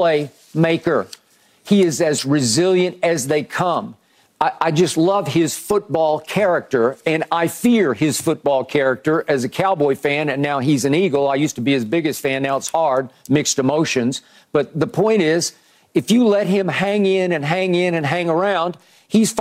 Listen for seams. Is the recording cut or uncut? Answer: uncut